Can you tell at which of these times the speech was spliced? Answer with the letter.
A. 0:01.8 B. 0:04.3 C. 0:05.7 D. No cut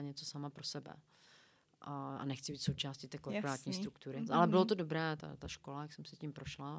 B